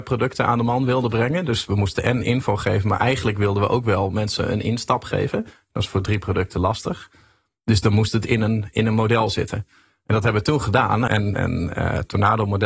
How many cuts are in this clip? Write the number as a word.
one